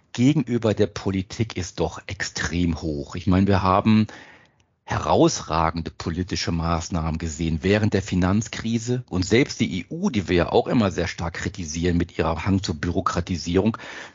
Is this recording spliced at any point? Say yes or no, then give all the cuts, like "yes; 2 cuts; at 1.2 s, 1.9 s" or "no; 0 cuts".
yes; 1 cut; at 9.1 s